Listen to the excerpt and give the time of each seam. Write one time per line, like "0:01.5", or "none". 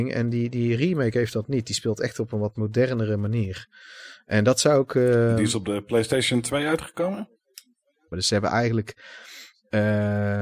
0:08.1